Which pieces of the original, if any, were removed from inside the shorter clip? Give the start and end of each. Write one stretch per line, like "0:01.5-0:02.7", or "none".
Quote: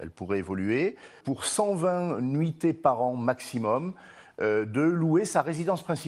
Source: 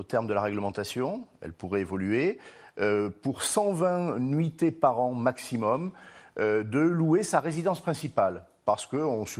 0:02.6-0:03.2